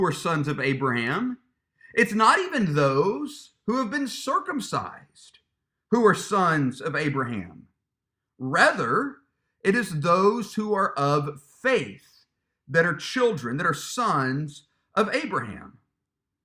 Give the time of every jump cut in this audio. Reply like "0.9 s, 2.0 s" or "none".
none